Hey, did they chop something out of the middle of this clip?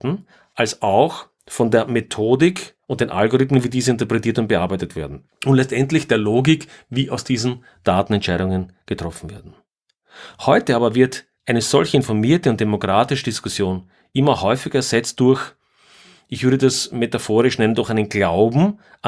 no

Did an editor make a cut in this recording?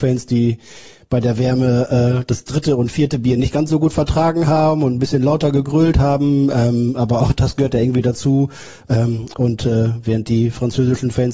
no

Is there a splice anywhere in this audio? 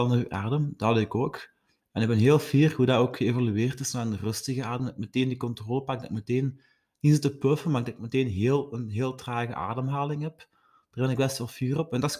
no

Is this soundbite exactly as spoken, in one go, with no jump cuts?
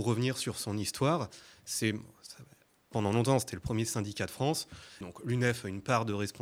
no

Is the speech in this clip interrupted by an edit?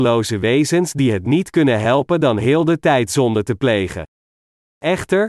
no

